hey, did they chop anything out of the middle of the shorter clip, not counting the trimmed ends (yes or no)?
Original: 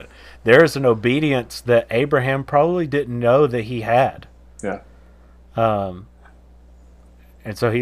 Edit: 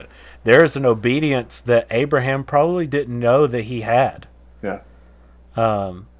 no